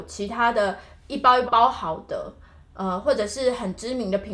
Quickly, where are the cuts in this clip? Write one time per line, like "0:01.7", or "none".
0:01.5